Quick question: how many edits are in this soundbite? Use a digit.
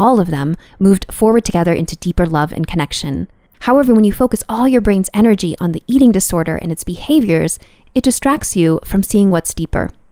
1